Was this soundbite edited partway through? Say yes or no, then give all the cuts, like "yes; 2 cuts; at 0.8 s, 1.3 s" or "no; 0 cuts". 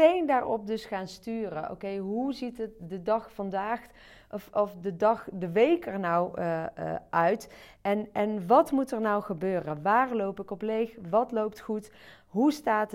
no; 0 cuts